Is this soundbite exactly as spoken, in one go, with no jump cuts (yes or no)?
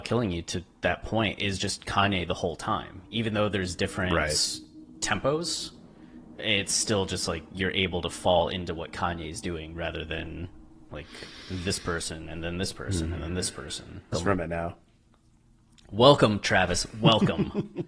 no